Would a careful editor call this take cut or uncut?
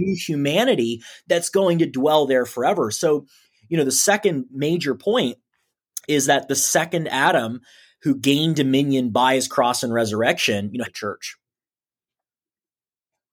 cut